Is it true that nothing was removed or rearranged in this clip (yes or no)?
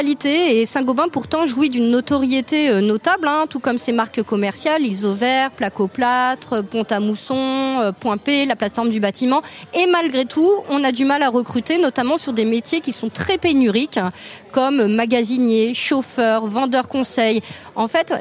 yes